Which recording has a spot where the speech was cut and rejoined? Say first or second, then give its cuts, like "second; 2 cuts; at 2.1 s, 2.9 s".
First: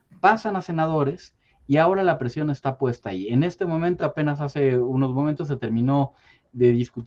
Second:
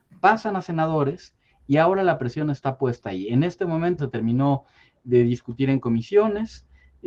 second; 1 cut; at 4.0 s